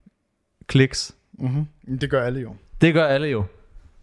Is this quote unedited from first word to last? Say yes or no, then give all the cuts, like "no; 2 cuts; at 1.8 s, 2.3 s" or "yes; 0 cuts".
yes; 0 cuts